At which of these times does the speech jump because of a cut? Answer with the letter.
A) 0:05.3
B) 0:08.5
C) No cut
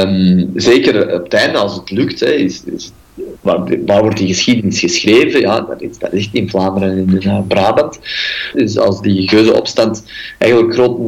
B